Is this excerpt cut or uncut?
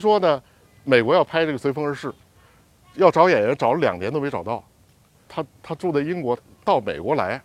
cut